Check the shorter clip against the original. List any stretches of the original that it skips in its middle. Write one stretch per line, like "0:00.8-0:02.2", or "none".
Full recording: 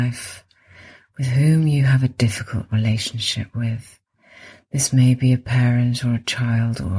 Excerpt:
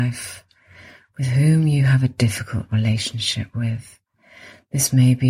none